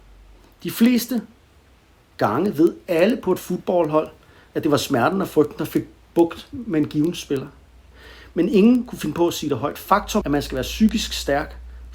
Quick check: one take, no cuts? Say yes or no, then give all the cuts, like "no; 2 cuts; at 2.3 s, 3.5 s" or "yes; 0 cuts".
no; 1 cut; at 10.2 s